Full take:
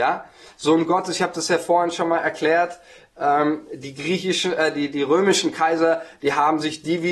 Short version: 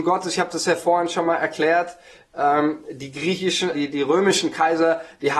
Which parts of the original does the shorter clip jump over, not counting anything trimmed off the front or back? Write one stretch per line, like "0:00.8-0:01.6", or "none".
0:04.5-0:04.7